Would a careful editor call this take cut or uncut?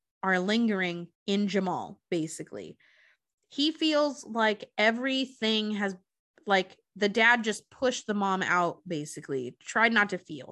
cut